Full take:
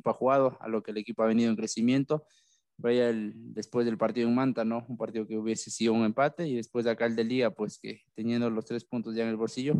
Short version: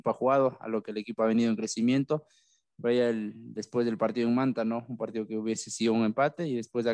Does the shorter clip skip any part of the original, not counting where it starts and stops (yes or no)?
no